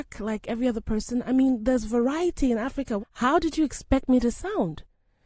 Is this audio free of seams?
no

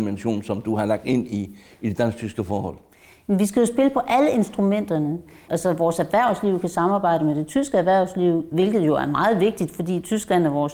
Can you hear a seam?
yes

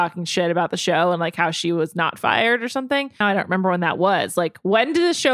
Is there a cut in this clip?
yes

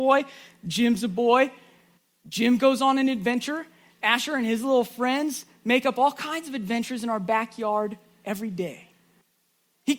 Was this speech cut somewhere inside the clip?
no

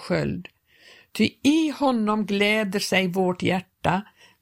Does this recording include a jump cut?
no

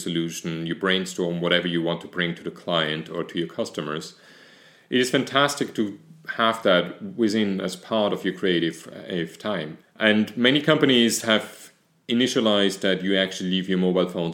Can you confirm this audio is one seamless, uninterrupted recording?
no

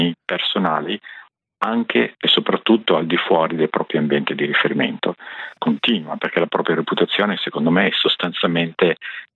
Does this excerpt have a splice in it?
yes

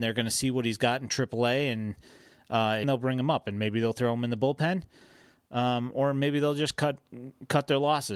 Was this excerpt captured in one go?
no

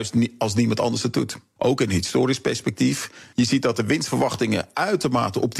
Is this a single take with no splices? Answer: no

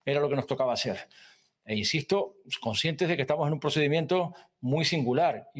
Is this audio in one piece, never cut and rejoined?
yes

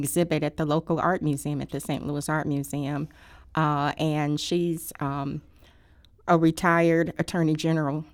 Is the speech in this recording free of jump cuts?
yes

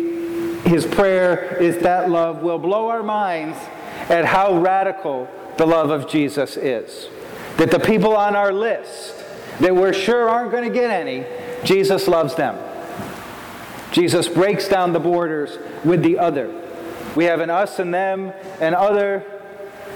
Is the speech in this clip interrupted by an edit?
yes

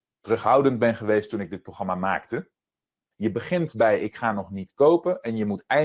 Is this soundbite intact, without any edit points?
no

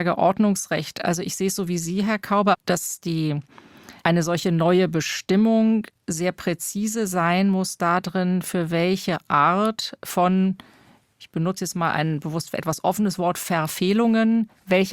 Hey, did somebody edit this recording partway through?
yes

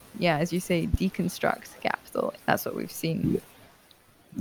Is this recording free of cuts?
no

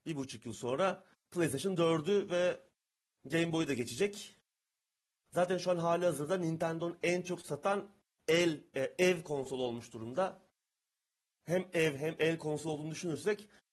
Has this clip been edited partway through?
no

